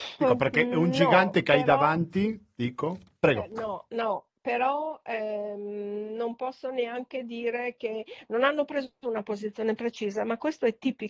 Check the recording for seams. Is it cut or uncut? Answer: uncut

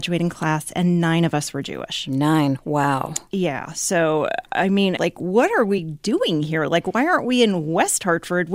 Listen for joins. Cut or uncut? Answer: cut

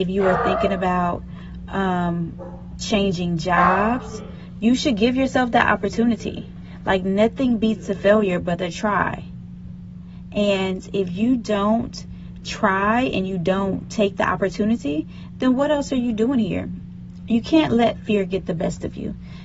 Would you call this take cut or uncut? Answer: uncut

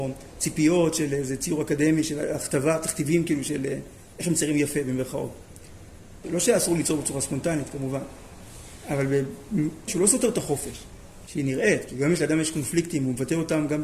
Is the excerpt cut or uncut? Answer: cut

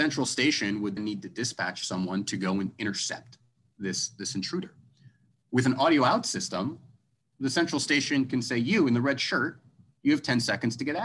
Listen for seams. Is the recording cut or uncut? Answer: cut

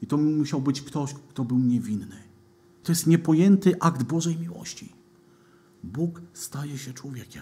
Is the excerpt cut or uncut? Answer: cut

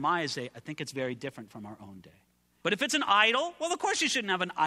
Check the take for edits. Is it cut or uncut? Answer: cut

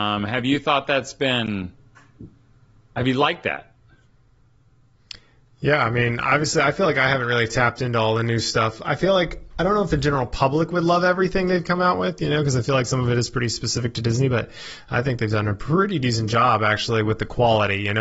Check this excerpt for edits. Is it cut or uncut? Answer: uncut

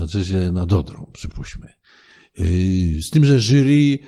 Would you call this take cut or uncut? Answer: uncut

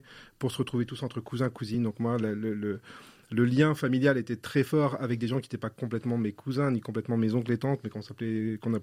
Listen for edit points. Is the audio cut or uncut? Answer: uncut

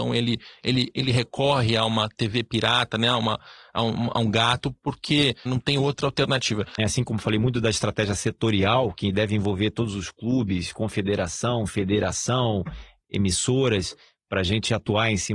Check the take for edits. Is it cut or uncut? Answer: cut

